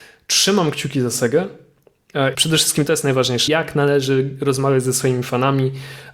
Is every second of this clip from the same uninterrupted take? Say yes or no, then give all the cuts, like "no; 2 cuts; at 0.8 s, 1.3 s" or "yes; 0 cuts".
no; 2 cuts; at 2.3 s, 3.5 s